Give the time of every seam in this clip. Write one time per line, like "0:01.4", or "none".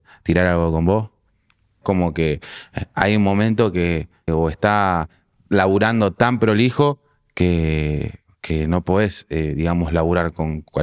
0:01.8
0:04.3